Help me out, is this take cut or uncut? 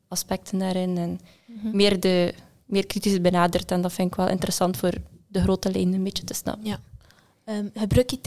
uncut